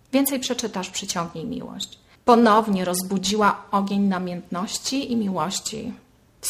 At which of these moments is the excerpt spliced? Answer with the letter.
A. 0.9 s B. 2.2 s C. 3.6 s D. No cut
B